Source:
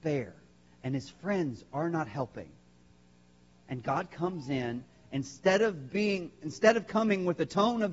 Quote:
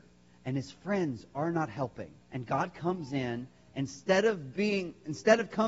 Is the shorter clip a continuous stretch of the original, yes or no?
no